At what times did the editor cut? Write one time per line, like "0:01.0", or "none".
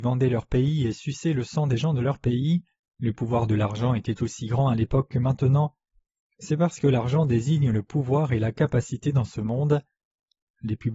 0:02.9